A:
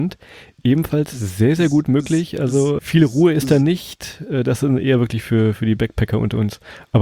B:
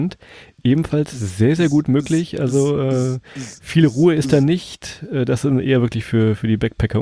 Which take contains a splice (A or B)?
A